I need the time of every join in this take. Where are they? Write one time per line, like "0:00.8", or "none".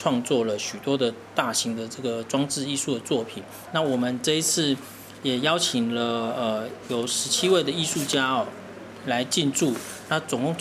0:03.7